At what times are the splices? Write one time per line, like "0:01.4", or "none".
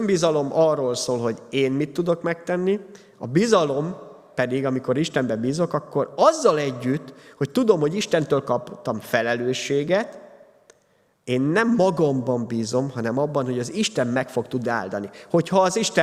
none